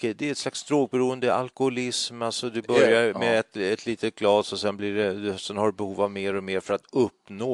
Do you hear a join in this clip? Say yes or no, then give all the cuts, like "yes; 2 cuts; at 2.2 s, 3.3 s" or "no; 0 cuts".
no; 0 cuts